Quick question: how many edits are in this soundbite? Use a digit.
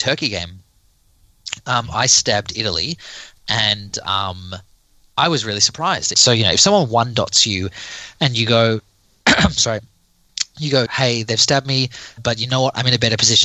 3